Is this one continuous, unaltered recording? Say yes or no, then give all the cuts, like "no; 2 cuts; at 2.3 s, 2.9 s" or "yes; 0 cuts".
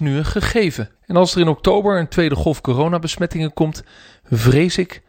no; 1 cut; at 1.0 s